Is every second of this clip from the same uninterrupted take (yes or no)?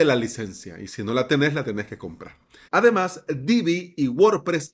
no